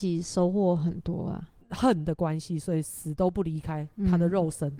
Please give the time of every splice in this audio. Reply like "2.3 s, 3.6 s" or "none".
1.6 s